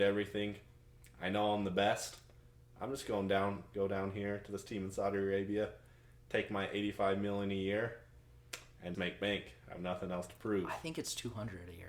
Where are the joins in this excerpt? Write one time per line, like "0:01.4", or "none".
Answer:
0:08.9